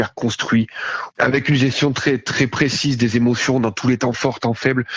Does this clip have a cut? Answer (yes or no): no